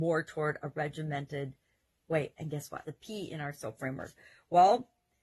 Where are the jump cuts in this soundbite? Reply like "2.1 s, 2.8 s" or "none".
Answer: 2.8 s